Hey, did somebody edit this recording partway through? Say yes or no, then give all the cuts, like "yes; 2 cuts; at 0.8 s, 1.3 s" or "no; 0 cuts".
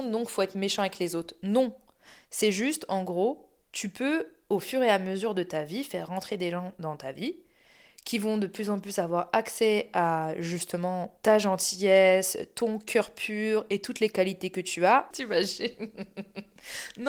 yes; 1 cut; at 15.1 s